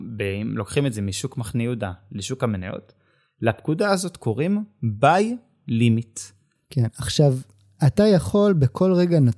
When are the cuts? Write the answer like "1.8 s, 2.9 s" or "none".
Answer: none